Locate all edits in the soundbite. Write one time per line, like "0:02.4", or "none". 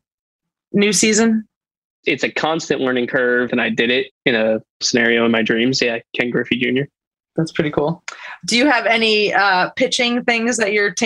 0:03.5